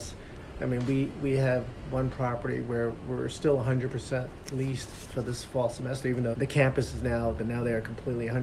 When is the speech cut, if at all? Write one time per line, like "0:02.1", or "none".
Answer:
0:06.3
0:07.4